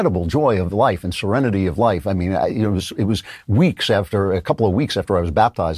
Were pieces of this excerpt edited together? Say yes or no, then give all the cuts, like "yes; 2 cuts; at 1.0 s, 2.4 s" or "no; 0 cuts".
no; 0 cuts